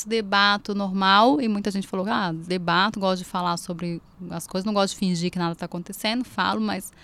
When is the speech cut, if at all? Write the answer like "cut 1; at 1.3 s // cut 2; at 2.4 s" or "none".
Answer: none